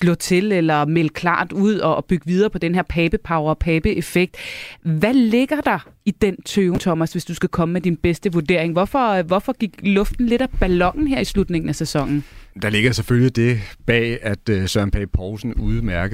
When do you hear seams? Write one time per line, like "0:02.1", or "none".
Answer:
none